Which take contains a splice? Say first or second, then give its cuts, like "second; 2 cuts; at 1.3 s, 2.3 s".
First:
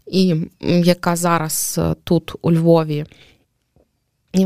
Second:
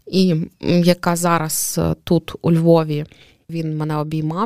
second; 1 cut; at 3.5 s